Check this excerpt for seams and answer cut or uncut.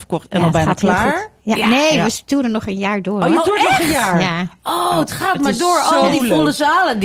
uncut